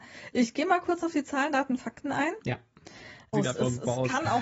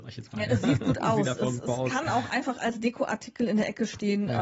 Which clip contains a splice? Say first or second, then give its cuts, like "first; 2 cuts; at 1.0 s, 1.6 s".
first; 1 cut; at 3.3 s